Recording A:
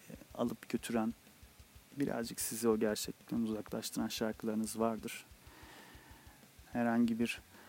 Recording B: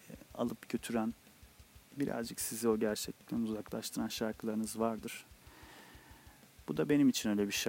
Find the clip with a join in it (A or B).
A